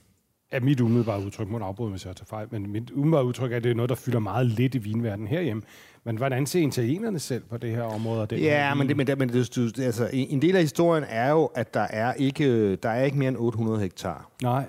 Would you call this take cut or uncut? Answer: uncut